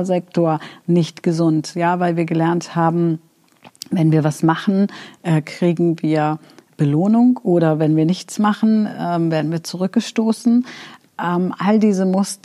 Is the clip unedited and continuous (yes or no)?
yes